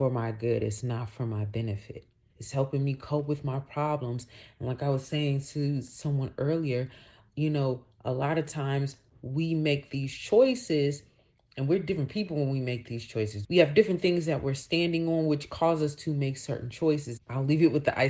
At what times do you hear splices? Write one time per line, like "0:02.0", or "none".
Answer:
0:02.3
0:13.4
0:17.2